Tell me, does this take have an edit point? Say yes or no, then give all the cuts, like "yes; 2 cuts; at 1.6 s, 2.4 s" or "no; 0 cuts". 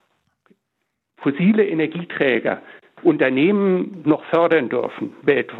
no; 0 cuts